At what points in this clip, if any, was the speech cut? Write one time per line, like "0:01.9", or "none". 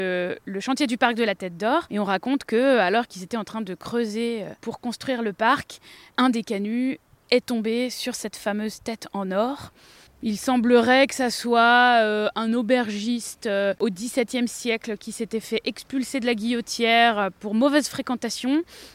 0:10.1